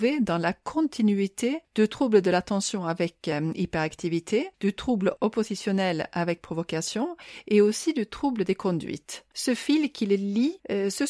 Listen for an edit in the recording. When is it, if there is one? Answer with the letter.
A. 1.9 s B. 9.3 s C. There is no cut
B